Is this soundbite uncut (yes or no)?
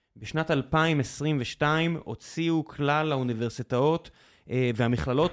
yes